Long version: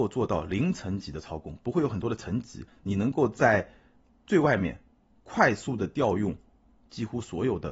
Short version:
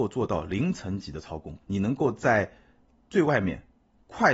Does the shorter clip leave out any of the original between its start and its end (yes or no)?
yes